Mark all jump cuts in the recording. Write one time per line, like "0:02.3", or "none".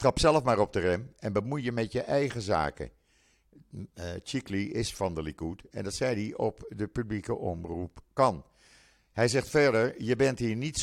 none